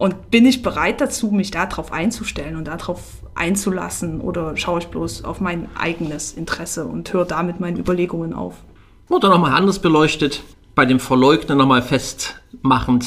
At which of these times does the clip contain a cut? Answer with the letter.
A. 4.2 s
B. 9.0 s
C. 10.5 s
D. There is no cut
D